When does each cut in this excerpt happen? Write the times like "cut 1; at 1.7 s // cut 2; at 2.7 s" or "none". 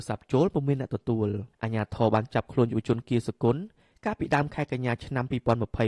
cut 1; at 1.5 s